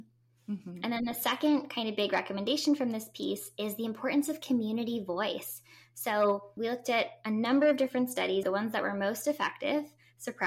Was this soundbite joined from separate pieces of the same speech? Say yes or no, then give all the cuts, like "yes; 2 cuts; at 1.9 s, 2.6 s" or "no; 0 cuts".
yes; 2 cuts; at 6.6 s, 8.4 s